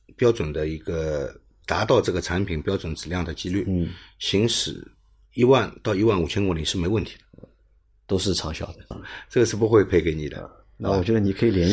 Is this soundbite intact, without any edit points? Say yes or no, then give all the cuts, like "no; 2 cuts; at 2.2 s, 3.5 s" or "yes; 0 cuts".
no; 1 cut; at 8.9 s